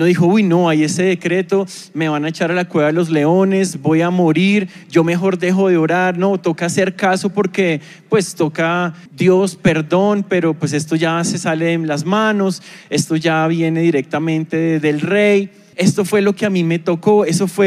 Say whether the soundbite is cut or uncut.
cut